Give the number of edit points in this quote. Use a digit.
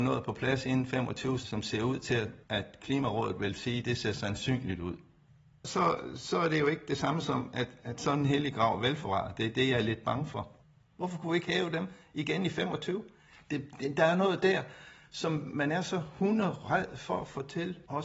1